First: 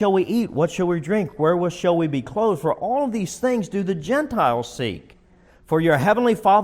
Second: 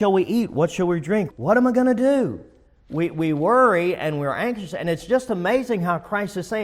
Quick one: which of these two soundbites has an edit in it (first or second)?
second